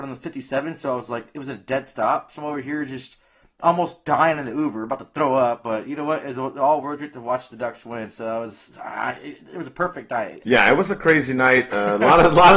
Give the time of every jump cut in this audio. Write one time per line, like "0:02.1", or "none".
0:10.4